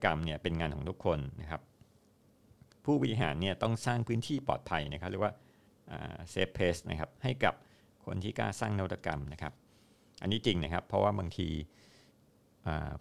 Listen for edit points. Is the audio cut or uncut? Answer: uncut